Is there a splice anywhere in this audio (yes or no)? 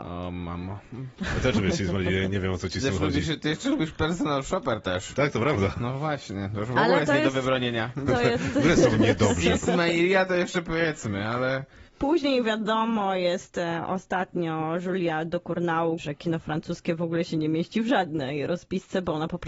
yes